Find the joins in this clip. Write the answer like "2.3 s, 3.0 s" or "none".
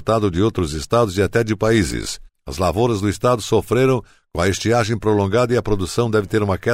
2.3 s